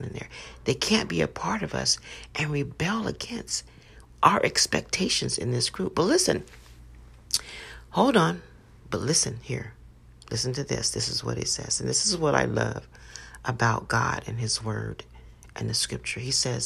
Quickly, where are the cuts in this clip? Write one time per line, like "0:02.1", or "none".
none